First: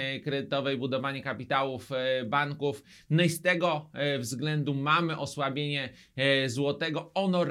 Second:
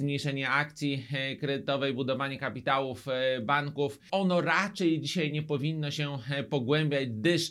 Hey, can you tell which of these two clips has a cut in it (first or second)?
second